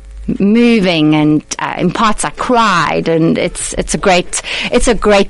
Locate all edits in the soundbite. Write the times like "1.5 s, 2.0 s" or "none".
none